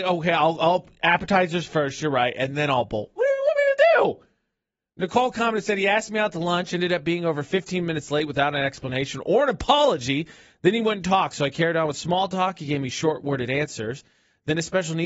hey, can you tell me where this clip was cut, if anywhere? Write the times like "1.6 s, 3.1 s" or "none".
none